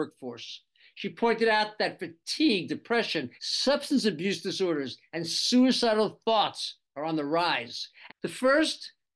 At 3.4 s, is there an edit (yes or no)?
yes